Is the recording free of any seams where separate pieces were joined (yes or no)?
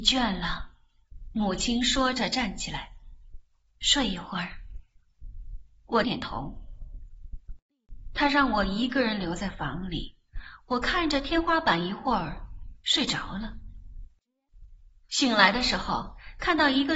no